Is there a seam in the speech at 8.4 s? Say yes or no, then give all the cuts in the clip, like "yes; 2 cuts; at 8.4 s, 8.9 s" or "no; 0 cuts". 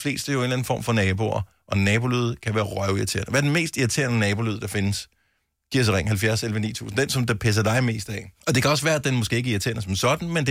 yes; 1 cut; at 8.4 s